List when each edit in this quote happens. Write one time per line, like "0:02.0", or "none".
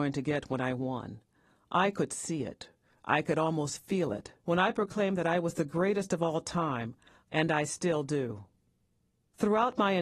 0:04.4
0:07.2